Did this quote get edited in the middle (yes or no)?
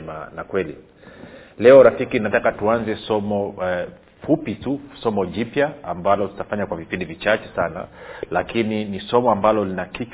no